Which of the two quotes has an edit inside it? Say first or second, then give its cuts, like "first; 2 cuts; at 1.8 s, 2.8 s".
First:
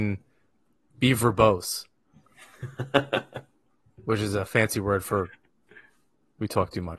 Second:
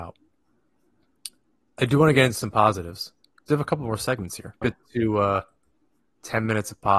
second; 1 cut; at 4.6 s